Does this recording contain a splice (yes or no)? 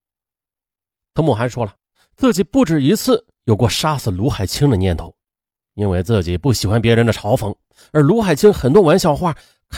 no